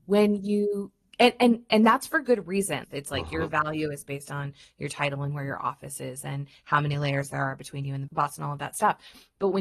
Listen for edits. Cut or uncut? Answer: cut